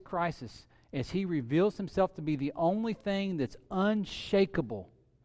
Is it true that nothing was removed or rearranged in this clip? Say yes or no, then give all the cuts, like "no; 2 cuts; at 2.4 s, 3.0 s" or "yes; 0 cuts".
yes; 0 cuts